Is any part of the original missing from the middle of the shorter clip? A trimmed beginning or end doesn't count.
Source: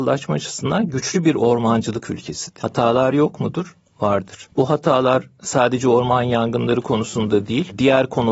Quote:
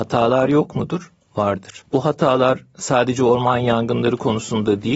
no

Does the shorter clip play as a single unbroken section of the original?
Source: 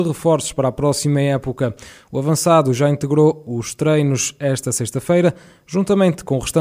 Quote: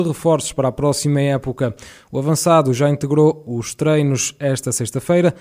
yes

